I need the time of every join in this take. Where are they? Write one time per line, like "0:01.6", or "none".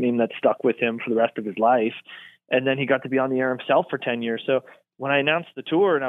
none